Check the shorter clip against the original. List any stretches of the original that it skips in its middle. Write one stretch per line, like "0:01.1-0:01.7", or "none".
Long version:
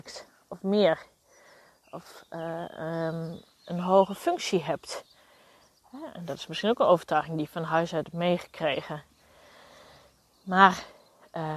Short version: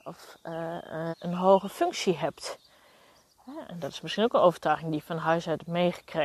0:03.0-0:03.6